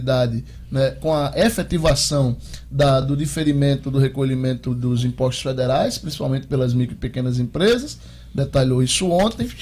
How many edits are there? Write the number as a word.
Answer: zero